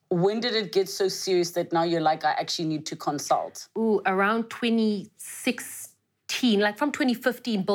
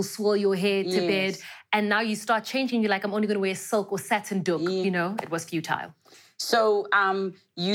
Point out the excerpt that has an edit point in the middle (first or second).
second